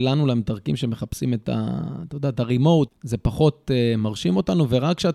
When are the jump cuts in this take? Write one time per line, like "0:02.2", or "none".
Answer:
0:02.9

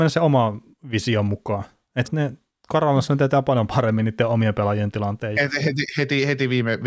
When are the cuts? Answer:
0:02.0
0:05.4

